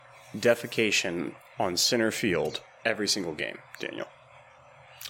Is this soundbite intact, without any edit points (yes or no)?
no